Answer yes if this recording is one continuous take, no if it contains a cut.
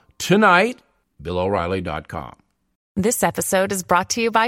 no